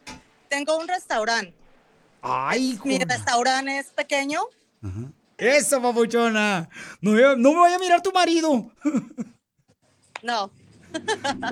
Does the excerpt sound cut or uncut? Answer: cut